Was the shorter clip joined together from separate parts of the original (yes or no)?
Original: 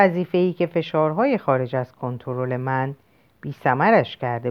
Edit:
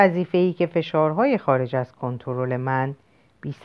no